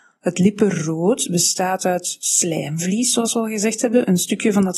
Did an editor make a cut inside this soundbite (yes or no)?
no